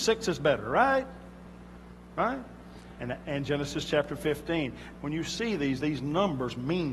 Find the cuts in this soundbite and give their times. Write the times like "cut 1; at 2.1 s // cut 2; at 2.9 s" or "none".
cut 1; at 3.0 s // cut 2; at 4.9 s